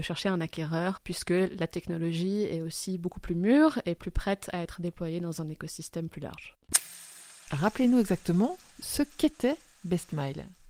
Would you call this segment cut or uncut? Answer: uncut